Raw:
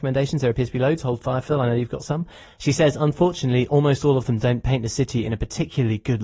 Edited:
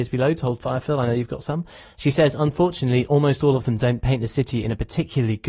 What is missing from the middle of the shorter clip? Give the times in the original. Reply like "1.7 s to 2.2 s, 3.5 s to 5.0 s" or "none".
none